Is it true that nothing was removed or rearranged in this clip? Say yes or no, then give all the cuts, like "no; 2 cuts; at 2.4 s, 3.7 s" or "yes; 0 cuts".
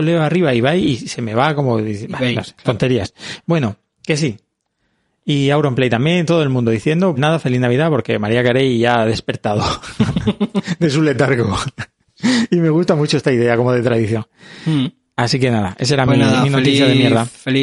no; 1 cut; at 7.2 s